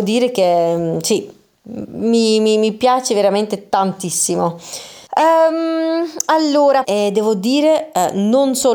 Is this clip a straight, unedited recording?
no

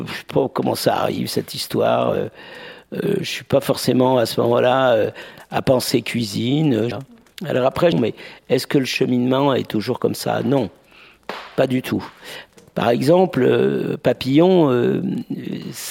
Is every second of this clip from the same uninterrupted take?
no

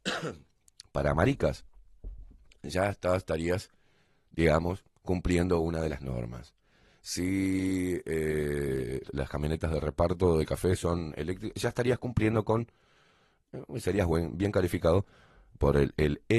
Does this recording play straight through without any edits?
no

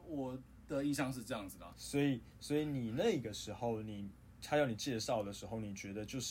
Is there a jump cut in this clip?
yes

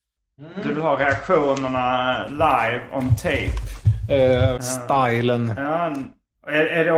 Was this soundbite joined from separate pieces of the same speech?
yes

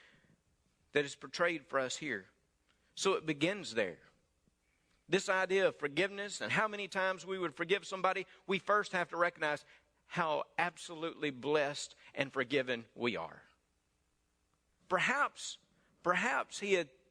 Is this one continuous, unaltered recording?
no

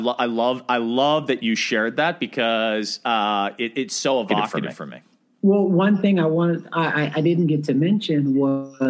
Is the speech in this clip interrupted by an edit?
no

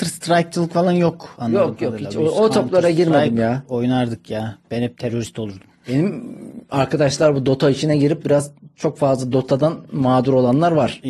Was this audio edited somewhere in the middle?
no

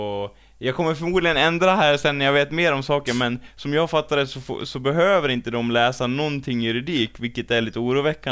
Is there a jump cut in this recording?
no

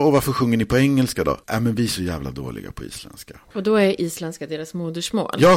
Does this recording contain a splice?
no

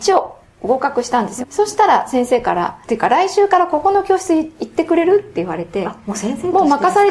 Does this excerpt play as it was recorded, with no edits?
no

